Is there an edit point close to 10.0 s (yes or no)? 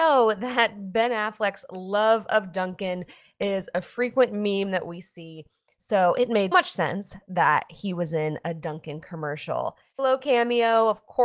yes